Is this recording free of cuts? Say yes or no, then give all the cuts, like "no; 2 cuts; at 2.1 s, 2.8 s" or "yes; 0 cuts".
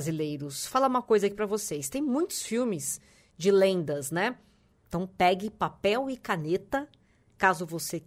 no; 1 cut; at 4.7 s